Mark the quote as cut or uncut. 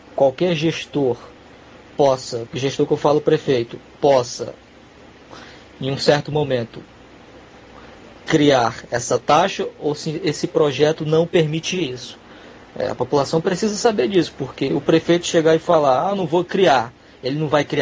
uncut